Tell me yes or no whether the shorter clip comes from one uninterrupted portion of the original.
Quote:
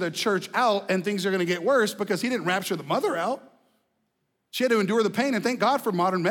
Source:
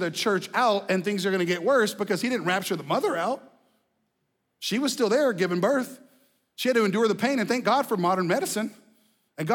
no